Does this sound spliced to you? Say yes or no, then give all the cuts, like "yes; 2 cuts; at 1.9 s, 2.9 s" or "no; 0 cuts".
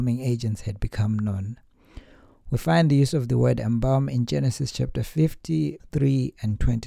yes; 1 cut; at 5.8 s